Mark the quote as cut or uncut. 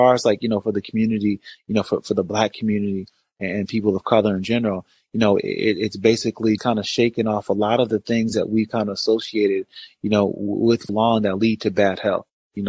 cut